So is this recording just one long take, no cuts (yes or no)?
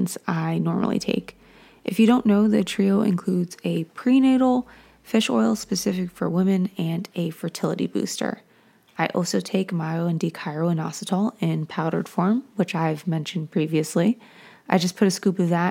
yes